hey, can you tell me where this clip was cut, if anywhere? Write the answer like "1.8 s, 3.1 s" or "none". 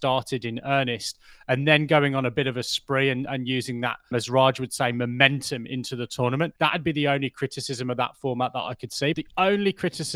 4.1 s, 6.6 s, 9.1 s